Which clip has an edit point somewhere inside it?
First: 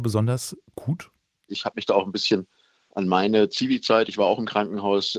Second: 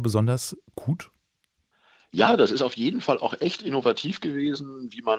first; 1 cut; at 1.5 s

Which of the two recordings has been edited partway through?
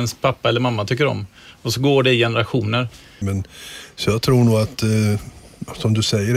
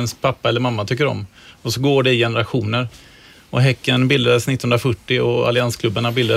first; 1 cut; at 3.2 s

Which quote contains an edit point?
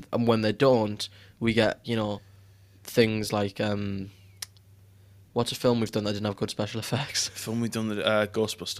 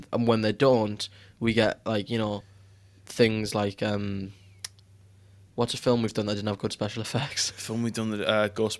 first; 1 cut; at 1.8 s

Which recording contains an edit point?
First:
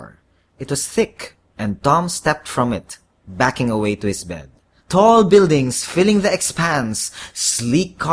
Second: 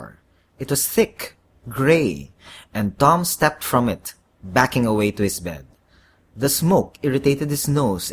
first; 2 cuts; at 1.5 s, 4.8 s

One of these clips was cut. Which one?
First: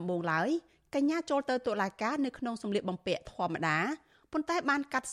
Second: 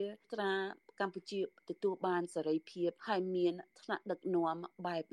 second; 1 cut; at 3.0 s

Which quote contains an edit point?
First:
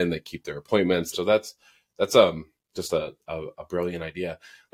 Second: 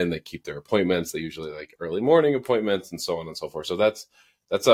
first; 1 cut; at 1.1 s

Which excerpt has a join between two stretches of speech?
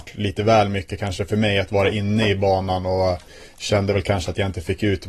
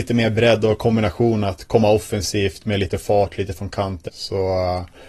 second; 2 cuts; at 1.7 s, 4.1 s

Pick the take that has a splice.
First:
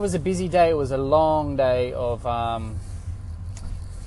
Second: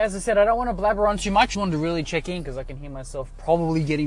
second; 1 cut; at 1.5 s

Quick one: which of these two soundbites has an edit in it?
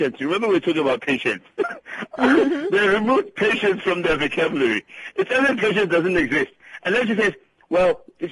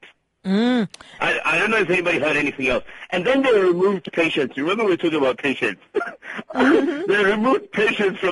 second; 1 cut; at 1.2 s

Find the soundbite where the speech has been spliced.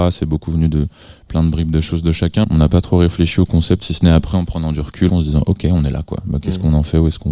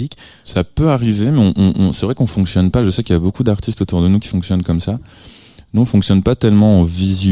first; 2 cuts; at 2.4 s, 5.1 s

